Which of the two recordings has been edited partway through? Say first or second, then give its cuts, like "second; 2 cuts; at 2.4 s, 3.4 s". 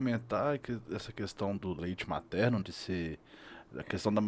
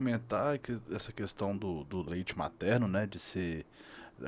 first; 2 cuts; at 1.6 s, 2.6 s